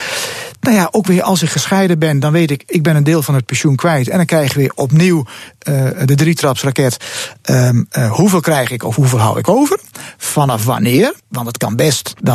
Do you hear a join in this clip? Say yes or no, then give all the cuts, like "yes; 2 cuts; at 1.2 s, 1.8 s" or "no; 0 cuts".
no; 0 cuts